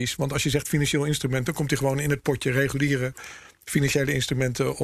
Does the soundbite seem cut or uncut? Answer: uncut